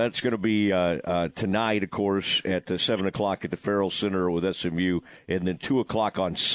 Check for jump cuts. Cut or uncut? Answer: uncut